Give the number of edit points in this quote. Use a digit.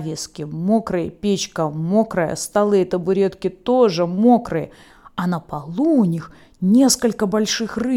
0